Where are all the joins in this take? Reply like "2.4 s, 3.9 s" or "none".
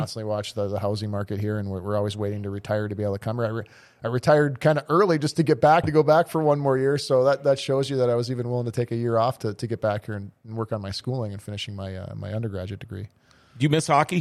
5.8 s